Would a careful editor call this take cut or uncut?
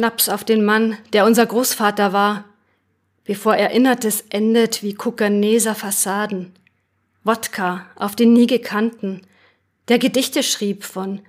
uncut